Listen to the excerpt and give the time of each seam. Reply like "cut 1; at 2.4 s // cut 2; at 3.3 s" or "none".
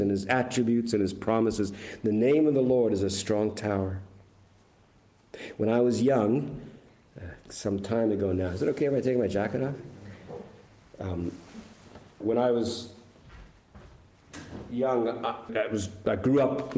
cut 1; at 12.2 s // cut 2; at 15.5 s